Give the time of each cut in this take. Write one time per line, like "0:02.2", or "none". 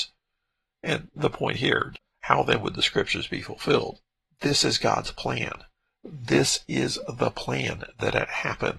none